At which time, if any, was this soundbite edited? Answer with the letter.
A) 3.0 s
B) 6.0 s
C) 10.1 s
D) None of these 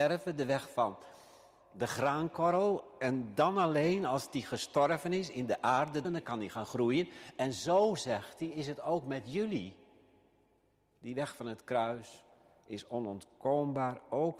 B